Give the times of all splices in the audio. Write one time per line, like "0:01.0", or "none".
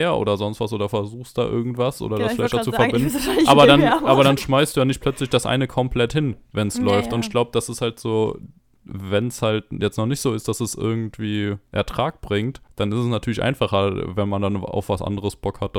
none